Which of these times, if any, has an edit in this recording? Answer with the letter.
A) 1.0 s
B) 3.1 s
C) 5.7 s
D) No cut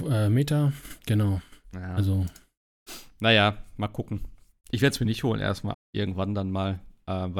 C